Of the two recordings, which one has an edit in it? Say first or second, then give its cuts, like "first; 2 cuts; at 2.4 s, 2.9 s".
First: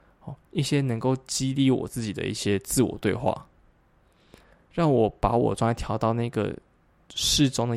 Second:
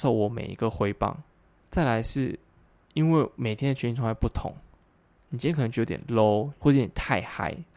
second; 2 cuts; at 1.6 s, 6.6 s